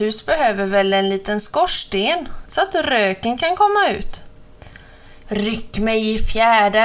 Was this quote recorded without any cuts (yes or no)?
no